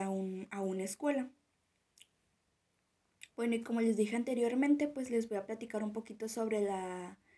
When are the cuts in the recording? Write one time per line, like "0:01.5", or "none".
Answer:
0:03.3